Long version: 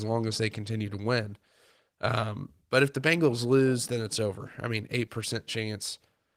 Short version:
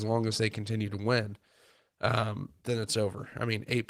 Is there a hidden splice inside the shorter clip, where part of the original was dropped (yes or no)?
yes